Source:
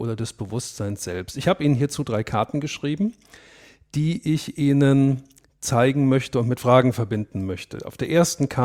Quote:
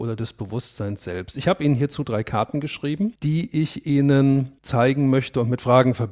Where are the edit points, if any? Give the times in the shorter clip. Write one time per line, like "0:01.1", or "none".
0:03.2
0:04.6